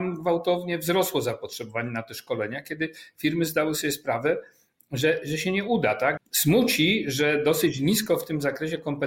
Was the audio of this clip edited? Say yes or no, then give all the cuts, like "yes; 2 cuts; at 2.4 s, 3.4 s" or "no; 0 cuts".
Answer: yes; 1 cut; at 6.2 s